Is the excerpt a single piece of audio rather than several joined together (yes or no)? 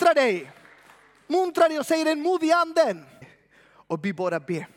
no